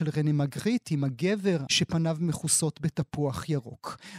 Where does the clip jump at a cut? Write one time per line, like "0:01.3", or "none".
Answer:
0:01.7